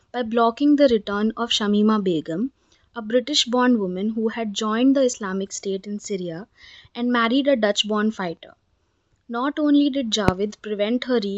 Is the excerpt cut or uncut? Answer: uncut